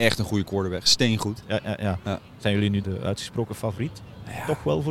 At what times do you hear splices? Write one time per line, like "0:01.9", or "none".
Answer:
0:01.4
0:02.8